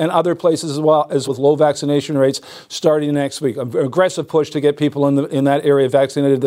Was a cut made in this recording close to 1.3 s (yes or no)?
yes